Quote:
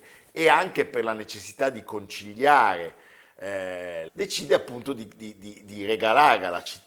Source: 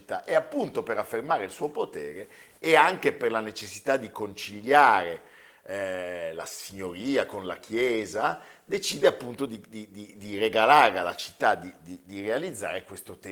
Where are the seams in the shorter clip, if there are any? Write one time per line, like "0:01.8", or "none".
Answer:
0:04.1